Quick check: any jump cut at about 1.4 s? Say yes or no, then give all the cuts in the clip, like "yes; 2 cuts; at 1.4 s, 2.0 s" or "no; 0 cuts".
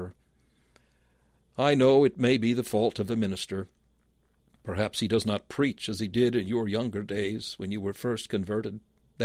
yes; 1 cut; at 1.4 s